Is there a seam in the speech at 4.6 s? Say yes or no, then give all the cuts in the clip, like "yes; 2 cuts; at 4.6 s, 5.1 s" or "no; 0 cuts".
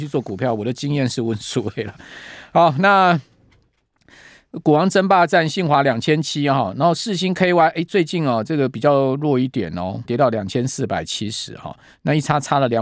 no; 1 cut; at 10.0 s